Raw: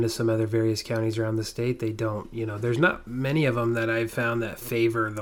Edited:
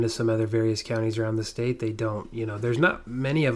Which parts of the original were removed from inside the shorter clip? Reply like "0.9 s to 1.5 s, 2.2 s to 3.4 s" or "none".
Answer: none